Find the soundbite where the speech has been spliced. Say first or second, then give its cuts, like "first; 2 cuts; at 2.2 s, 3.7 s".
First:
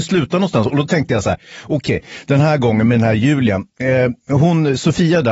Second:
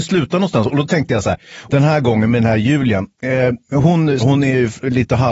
second; 2 cuts; at 1.7 s, 4.2 s